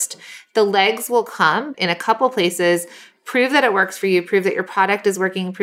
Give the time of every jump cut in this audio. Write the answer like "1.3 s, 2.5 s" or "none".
1.7 s

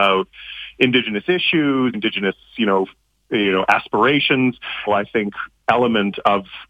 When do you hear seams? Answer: 1.9 s, 4.9 s

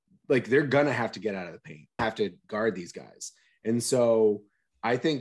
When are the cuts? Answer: 2.0 s

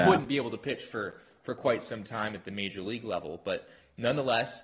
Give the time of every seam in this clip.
none

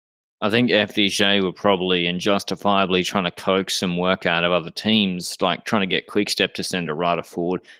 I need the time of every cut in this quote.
none

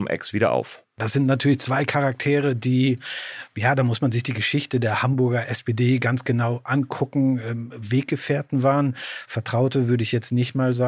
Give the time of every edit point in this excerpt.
none

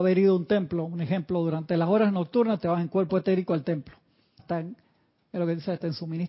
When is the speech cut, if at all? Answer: 4.4 s

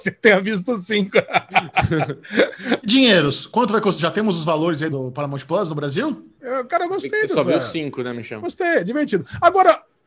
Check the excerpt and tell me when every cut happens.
4.9 s, 6.4 s

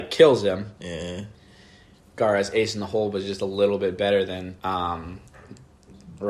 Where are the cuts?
2.0 s, 4.6 s

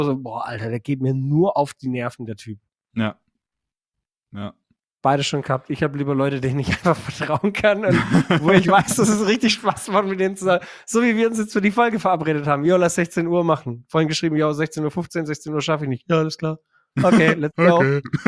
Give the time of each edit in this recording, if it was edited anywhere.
none

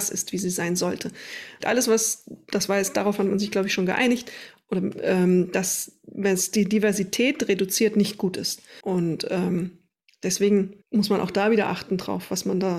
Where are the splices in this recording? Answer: 1.6 s, 8.8 s, 10.8 s

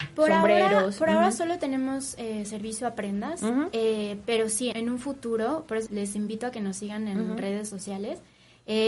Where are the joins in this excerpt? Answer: 4.7 s, 5.9 s

